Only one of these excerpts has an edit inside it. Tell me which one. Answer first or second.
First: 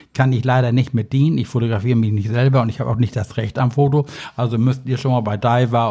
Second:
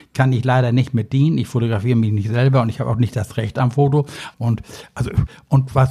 second